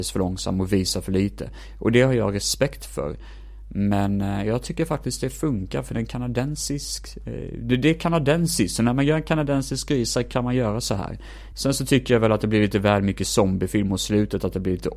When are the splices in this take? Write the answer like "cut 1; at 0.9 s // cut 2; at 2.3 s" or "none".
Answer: cut 1; at 11.5 s